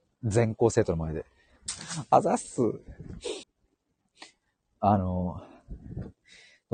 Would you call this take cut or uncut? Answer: cut